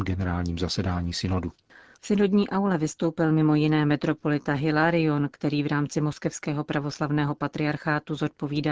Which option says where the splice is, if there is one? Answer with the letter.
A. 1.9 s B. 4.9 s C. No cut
A